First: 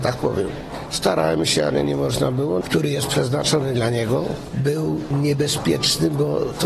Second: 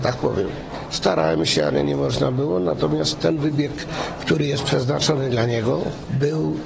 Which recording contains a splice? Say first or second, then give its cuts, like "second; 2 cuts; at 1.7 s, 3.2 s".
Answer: first; 1 cut; at 2.6 s